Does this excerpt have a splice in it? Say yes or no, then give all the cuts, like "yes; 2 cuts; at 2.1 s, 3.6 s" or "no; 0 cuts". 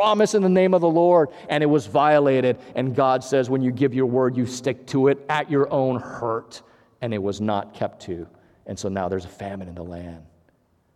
no; 0 cuts